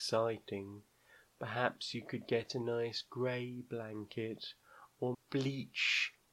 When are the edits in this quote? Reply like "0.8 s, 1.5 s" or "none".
5.1 s